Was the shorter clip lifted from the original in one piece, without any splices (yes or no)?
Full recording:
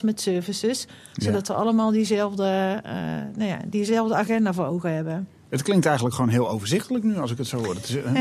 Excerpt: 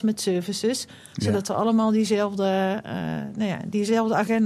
yes